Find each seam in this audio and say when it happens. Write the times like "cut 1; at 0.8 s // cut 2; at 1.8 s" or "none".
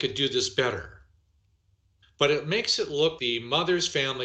cut 1; at 2.0 s // cut 2; at 3.2 s